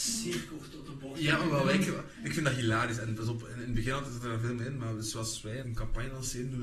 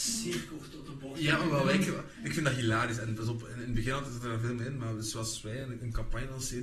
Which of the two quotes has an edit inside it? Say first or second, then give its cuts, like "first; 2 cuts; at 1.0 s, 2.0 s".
first; 1 cut; at 5.6 s